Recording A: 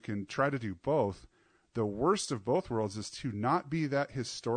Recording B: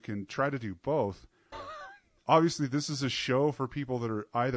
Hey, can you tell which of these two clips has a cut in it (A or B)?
B